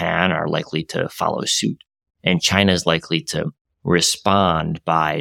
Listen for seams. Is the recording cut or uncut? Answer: uncut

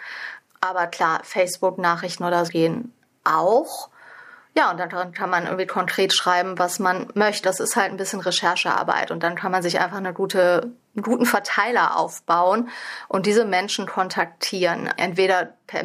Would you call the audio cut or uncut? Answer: cut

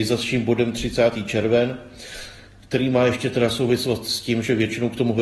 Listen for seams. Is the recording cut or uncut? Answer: uncut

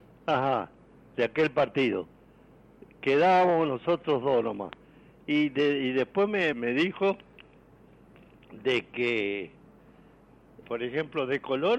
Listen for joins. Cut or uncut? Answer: cut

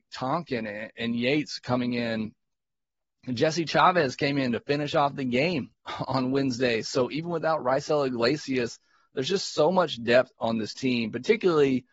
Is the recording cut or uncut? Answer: uncut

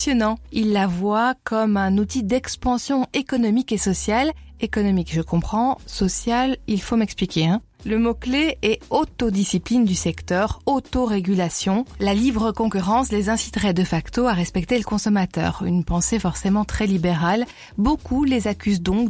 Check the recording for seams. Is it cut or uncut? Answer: uncut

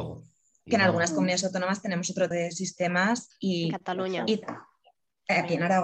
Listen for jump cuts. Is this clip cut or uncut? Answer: cut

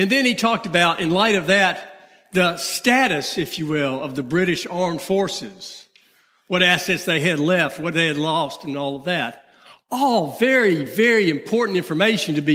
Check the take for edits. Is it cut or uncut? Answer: uncut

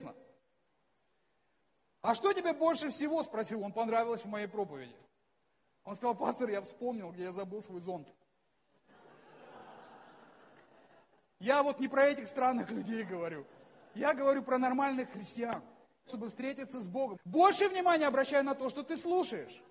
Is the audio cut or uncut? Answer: cut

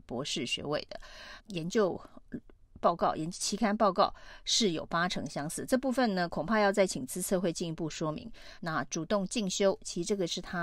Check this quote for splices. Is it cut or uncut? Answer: cut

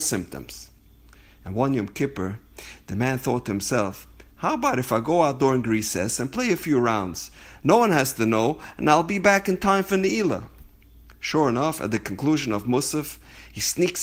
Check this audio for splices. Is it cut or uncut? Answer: uncut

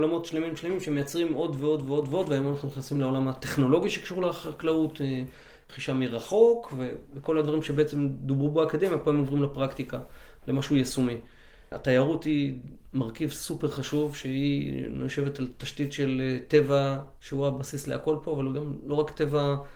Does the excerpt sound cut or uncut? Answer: uncut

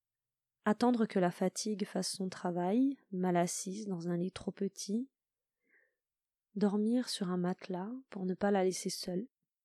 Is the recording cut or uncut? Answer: uncut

